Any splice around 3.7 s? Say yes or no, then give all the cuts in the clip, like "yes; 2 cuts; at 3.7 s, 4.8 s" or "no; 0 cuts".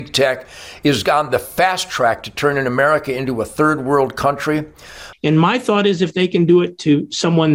no; 1 cut; at 5.1 s